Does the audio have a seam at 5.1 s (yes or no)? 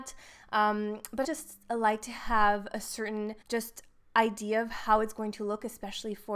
no